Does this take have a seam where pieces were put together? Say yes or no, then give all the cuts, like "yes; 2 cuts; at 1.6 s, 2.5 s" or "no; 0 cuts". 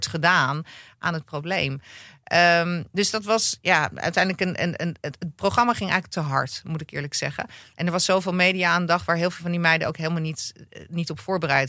no; 0 cuts